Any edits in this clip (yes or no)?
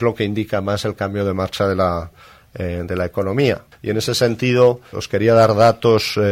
yes